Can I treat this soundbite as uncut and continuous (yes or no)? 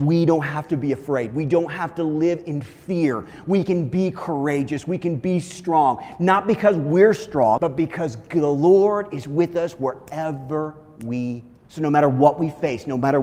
no